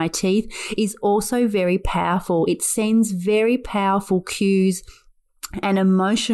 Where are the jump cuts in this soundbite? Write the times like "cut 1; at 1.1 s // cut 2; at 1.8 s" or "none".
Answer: none